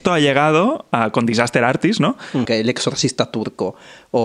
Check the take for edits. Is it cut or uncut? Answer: cut